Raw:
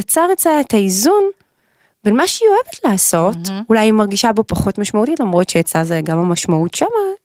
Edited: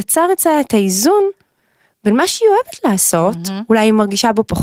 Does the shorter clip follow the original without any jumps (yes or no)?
yes